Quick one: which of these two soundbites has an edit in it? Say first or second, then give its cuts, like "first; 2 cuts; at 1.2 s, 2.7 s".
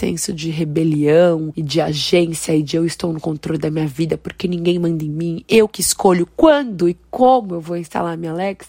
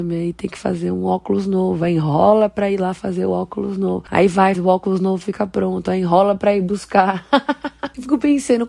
second; 1 cut; at 4.5 s